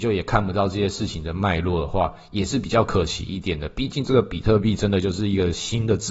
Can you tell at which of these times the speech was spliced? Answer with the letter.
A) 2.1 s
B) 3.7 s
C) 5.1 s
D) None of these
D